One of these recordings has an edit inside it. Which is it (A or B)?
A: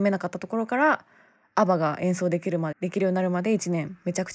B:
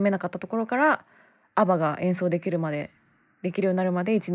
A